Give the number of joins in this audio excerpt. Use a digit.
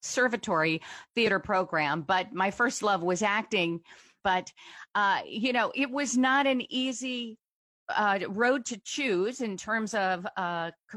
1